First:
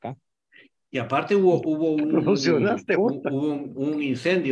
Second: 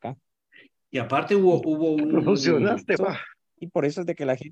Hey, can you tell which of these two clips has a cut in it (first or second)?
second